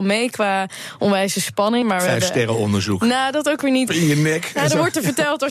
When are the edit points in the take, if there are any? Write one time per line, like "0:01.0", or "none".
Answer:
0:01.8
0:03.9